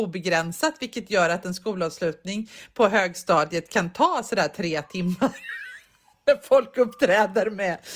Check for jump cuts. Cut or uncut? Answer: uncut